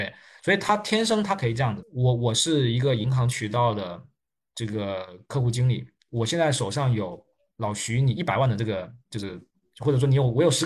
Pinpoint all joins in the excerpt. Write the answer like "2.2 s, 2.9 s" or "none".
1.8 s